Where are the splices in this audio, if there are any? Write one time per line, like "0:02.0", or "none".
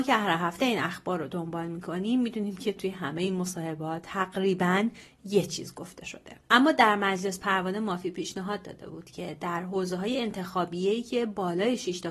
0:06.4